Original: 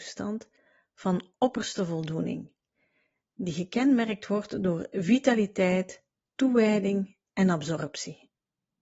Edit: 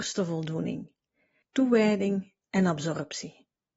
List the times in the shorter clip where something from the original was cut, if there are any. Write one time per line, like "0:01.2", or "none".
0:01.4